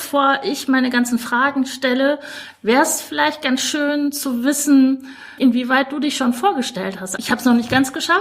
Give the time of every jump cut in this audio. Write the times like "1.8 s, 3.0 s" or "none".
5.4 s, 7.2 s